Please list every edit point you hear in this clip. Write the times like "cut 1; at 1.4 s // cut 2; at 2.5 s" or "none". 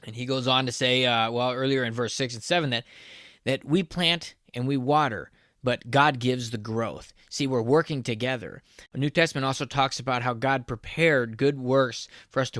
cut 1; at 8.9 s